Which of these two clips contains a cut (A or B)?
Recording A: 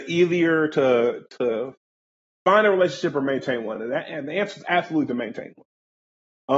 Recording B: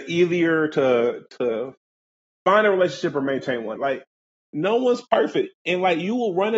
B